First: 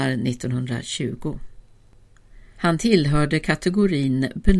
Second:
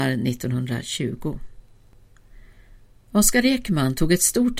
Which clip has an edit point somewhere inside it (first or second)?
first